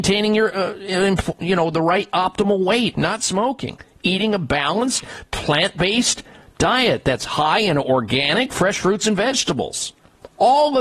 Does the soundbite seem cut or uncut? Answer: cut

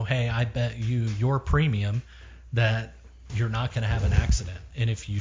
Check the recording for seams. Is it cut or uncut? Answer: cut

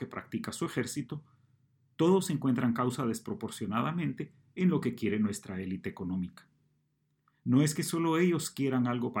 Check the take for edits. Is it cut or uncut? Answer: uncut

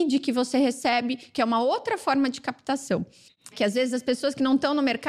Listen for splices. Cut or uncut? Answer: cut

